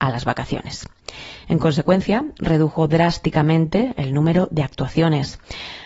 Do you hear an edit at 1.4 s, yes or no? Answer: no